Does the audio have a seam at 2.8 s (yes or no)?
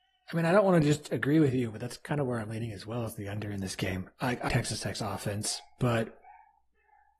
no